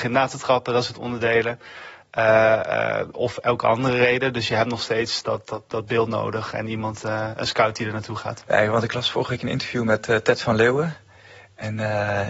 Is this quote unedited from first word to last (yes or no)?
yes